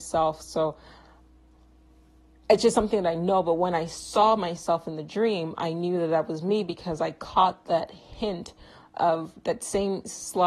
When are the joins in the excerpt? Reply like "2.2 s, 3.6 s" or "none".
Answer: none